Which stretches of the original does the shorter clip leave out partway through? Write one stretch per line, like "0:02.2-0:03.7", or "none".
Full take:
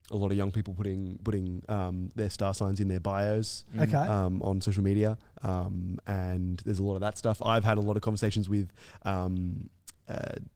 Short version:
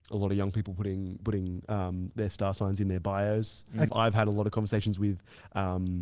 0:03.9-0:07.4